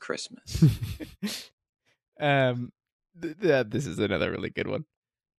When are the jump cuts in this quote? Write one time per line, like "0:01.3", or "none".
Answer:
none